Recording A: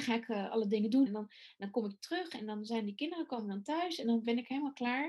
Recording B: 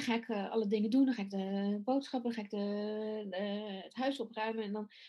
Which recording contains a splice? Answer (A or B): A